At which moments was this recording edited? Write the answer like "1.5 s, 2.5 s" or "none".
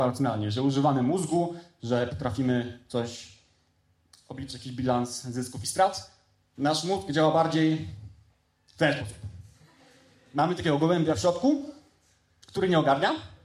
none